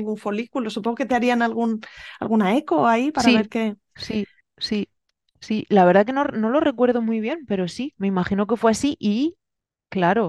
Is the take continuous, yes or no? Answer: yes